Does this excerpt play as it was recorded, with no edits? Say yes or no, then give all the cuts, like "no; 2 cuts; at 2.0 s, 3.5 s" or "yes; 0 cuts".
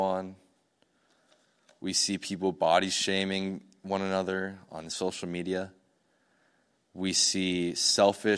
yes; 0 cuts